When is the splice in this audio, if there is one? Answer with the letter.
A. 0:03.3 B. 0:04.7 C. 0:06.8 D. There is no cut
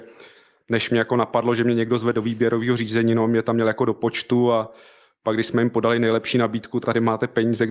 C